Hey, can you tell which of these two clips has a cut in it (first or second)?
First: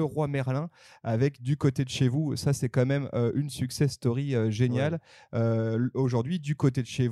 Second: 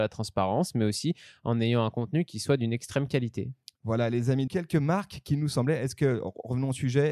second